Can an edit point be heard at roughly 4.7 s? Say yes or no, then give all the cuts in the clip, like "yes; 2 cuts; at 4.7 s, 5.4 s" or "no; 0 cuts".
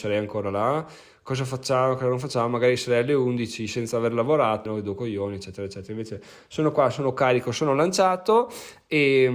yes; 1 cut; at 4.7 s